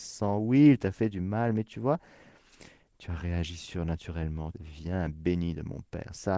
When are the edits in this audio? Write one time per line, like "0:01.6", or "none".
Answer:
0:04.5